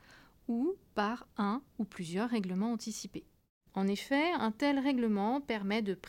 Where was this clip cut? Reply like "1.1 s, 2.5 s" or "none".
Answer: 3.7 s